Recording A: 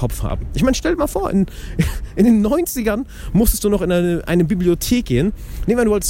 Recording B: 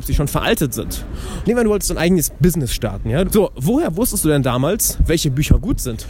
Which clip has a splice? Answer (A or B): B